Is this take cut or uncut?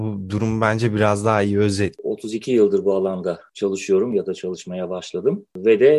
cut